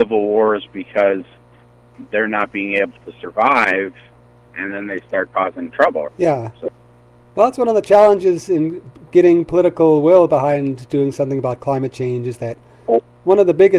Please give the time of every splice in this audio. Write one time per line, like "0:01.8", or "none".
0:04.5
0:06.1